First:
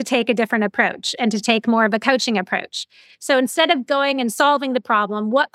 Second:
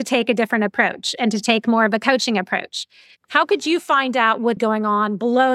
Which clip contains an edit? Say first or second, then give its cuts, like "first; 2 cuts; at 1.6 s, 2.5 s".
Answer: second; 2 cuts; at 3.2 s, 4.6 s